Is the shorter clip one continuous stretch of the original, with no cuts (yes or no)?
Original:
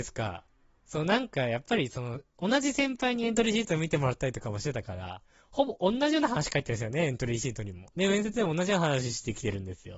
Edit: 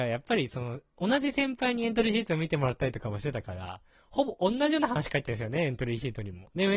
yes